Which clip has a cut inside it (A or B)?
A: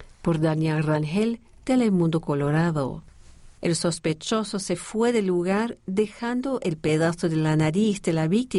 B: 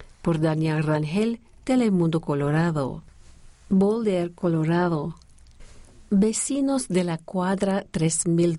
A